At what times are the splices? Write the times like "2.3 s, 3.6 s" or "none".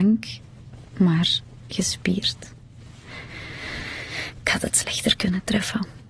none